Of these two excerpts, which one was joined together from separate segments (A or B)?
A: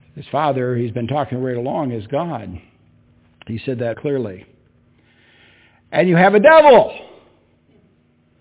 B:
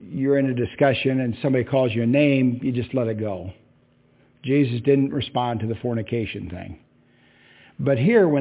A